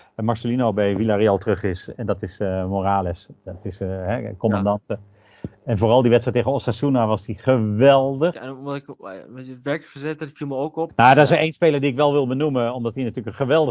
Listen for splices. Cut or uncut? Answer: cut